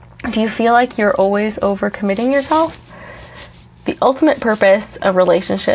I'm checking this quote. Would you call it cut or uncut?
uncut